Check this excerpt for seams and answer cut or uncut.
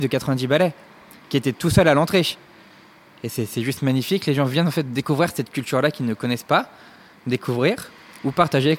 uncut